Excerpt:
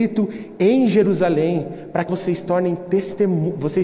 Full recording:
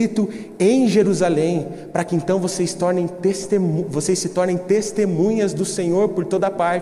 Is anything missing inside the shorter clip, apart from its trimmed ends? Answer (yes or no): yes